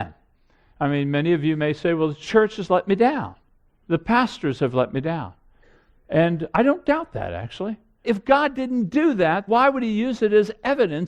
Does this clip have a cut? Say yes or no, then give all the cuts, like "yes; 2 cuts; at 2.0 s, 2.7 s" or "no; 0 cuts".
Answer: yes; 2 cuts; at 8.0 s, 9.5 s